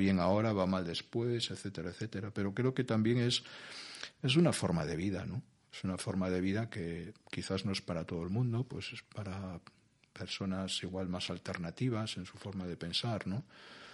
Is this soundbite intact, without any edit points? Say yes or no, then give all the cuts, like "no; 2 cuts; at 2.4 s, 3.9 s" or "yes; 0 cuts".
yes; 0 cuts